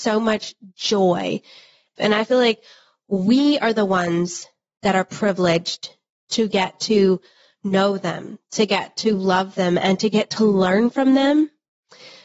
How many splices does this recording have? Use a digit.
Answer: 1